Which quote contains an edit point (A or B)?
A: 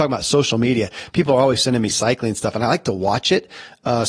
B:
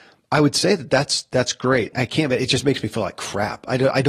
B